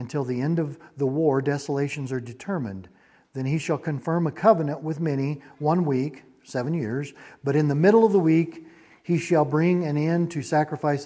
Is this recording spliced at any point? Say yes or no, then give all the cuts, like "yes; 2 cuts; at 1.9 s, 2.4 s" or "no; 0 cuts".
no; 0 cuts